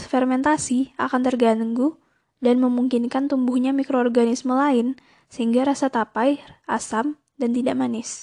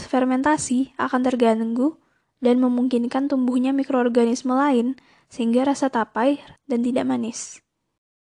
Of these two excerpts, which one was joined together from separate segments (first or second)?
second